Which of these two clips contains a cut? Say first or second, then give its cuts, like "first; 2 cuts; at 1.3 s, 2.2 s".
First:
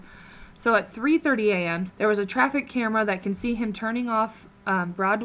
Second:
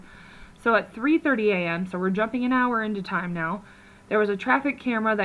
first; 1 cut; at 1.9 s